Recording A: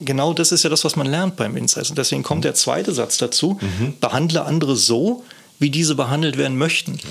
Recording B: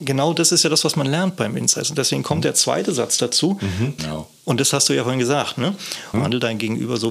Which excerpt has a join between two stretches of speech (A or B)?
B